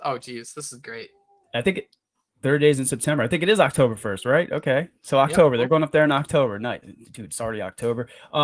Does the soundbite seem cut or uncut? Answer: uncut